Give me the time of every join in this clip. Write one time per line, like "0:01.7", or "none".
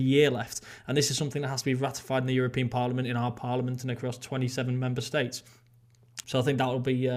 0:06.2